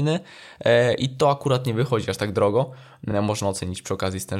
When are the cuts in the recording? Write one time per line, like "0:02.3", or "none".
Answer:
none

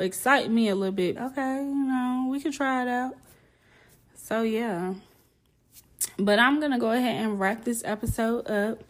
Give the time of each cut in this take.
0:01.2

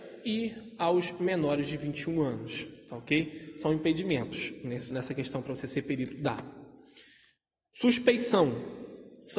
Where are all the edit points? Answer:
0:04.9

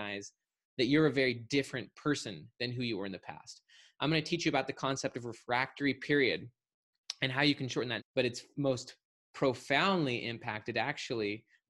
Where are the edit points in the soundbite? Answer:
0:08.0

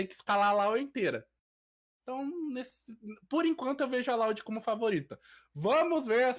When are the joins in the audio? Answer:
none

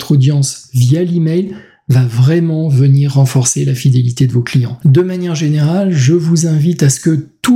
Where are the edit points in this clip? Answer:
0:04.8

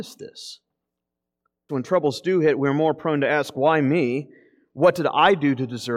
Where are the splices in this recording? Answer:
0:01.7

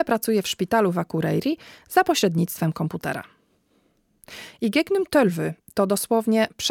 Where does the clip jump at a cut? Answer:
none

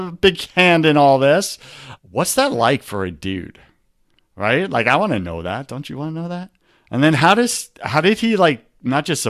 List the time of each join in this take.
0:02.0

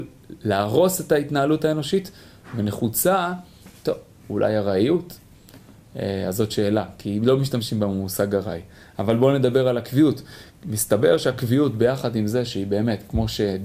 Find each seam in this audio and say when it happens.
none

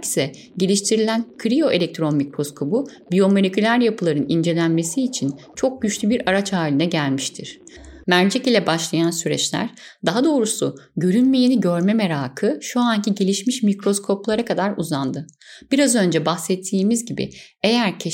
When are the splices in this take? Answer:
0:08.0

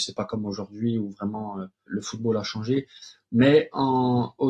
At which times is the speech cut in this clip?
0:01.9

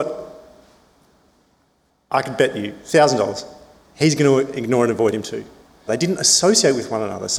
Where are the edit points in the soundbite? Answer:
0:05.9

